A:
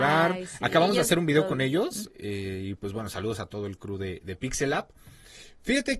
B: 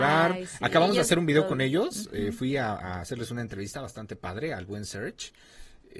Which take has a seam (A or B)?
A